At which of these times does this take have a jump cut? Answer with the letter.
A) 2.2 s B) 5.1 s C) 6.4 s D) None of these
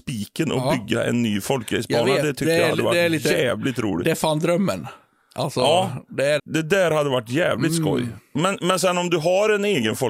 C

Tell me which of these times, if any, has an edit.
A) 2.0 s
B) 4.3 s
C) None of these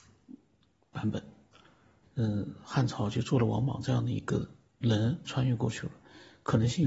A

